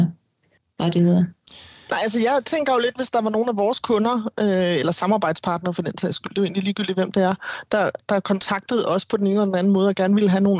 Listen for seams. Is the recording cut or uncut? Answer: uncut